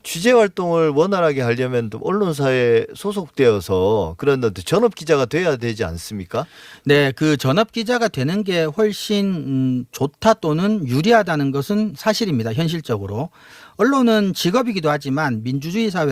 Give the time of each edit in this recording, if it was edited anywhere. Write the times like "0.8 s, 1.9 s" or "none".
none